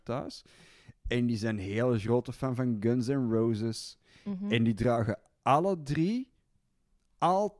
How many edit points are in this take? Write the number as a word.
zero